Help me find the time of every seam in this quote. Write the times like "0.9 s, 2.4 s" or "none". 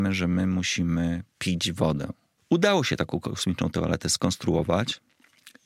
2.4 s